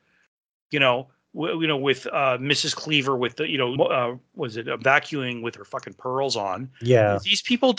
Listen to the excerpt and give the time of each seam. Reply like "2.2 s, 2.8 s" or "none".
3.8 s